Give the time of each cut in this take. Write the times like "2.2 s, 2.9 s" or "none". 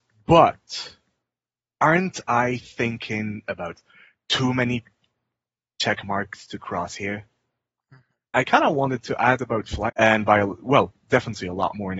8.3 s, 9.9 s